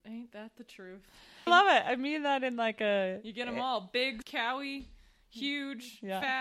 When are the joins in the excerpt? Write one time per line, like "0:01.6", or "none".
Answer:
0:01.5
0:04.2